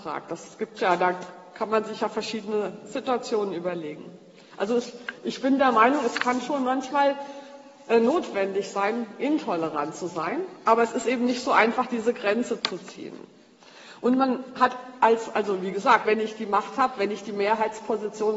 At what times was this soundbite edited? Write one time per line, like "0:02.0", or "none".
0:12.6
0:16.1